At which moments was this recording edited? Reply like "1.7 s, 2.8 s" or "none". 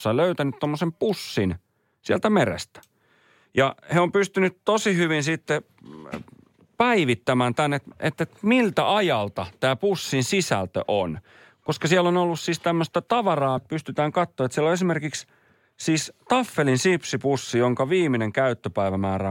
13.6 s